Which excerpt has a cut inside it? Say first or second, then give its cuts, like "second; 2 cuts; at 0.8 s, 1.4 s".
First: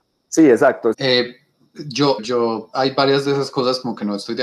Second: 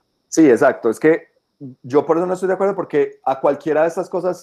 first; 2 cuts; at 0.9 s, 2.2 s